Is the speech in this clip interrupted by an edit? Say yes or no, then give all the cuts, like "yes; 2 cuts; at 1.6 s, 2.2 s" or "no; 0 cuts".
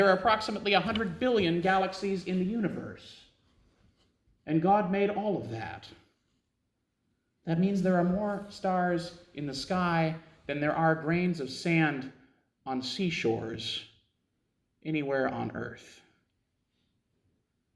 no; 0 cuts